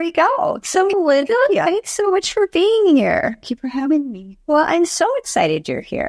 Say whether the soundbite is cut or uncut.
cut